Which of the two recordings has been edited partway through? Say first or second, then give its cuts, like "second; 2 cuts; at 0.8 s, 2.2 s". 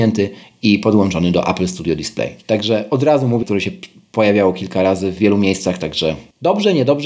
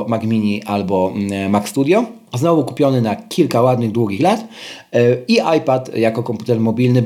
first; 2 cuts; at 2.4 s, 3.4 s